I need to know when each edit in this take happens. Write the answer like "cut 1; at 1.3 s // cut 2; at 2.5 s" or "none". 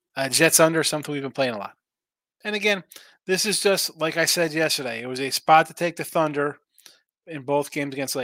cut 1; at 2.4 s